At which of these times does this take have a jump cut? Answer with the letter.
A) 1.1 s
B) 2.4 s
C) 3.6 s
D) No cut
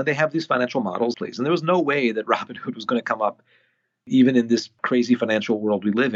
A